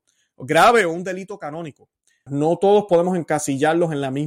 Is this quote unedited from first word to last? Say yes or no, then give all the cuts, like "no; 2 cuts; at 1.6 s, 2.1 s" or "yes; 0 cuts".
no; 1 cut; at 2.3 s